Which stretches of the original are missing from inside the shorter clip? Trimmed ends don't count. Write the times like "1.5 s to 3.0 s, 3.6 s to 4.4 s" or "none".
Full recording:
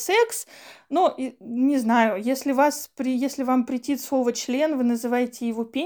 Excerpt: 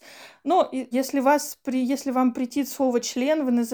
1.4 s to 2.2 s